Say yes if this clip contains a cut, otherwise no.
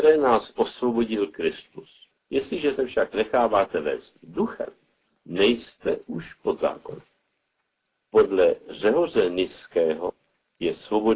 yes